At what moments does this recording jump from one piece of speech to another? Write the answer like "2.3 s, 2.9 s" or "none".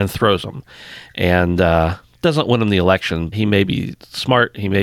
3.3 s